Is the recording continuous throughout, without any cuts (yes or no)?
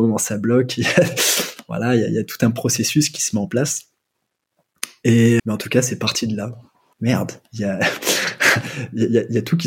no